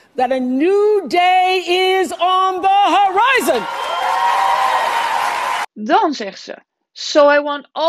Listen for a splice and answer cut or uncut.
uncut